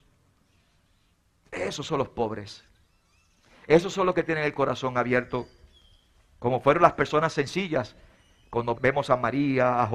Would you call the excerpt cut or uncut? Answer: cut